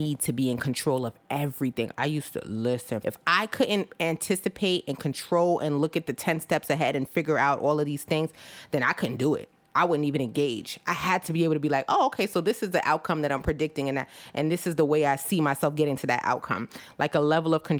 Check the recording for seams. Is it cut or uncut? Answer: cut